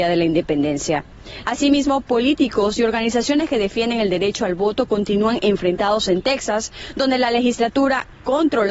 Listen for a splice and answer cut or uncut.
cut